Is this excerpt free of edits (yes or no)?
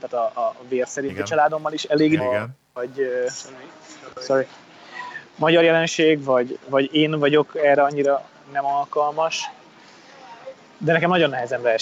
no